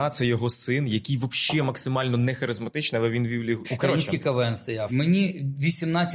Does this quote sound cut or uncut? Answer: cut